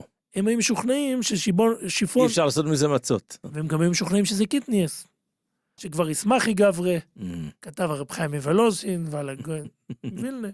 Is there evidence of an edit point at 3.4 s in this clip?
no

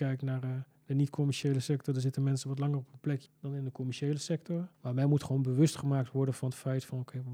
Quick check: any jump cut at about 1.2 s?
no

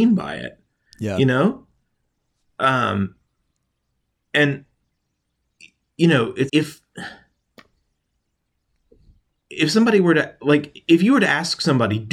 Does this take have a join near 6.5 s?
yes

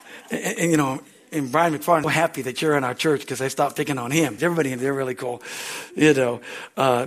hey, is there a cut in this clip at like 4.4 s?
yes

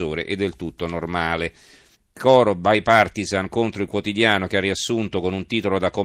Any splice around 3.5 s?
no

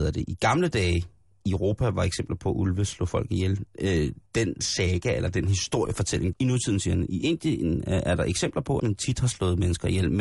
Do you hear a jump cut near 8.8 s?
yes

